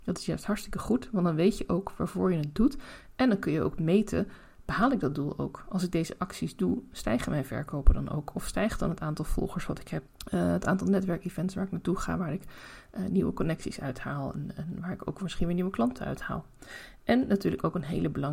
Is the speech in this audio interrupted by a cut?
yes; 1 cut; at 10.1 s

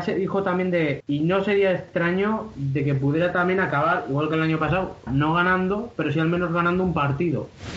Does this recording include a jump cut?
yes; 2 cuts; at 1.0 s, 5.1 s

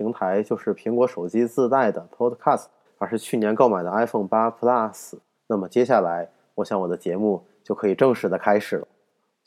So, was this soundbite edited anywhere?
yes; 2 cuts; at 2.9 s, 5.3 s

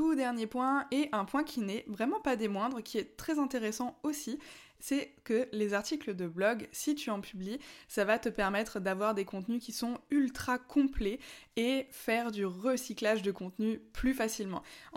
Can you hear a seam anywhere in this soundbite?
no; 0 cuts

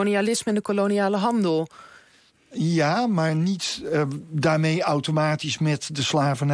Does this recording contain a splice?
no; 0 cuts

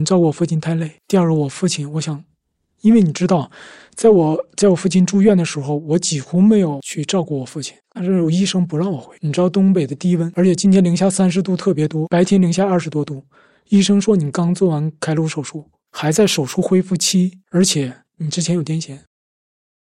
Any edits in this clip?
yes; 1 cut; at 7.8 s

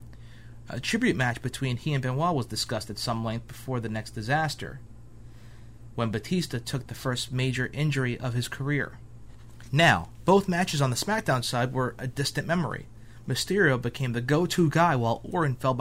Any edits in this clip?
no; 0 cuts

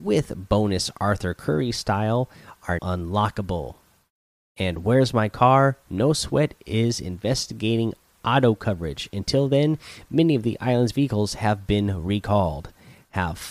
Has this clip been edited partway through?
yes; 1 cut; at 2.8 s

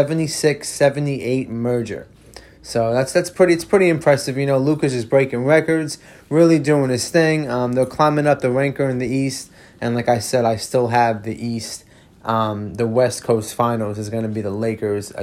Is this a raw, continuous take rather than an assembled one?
yes; 0 cuts

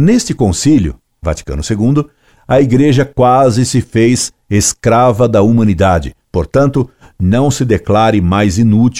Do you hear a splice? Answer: yes; 1 cut; at 6.2 s

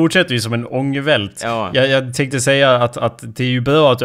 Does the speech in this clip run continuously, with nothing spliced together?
yes; 0 cuts

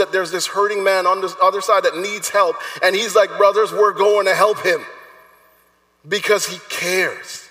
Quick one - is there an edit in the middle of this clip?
no; 0 cuts

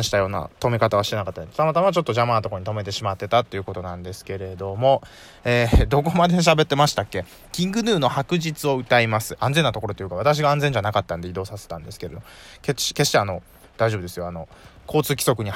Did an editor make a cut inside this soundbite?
yes; 1 cut; at 9.4 s

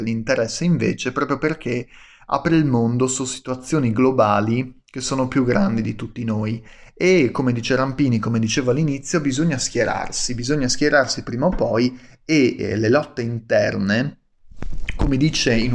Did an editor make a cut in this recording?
no; 0 cuts

